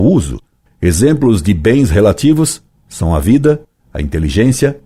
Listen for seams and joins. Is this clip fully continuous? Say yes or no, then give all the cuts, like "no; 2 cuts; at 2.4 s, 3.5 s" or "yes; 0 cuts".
yes; 0 cuts